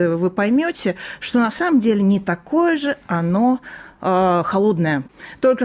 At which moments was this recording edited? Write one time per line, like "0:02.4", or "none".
none